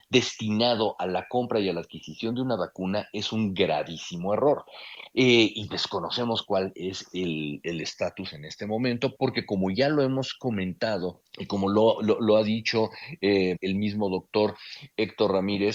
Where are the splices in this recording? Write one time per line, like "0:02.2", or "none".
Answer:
0:09.1
0:13.6